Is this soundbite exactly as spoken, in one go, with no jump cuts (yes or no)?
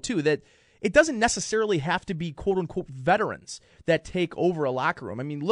yes